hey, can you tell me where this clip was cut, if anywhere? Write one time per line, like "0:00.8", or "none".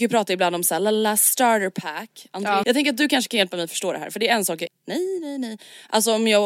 0:02.6
0:04.7